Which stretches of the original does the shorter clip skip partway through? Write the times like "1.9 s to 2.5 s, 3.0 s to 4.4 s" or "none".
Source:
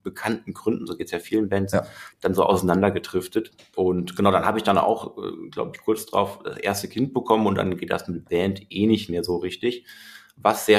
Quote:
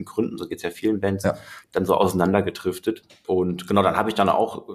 none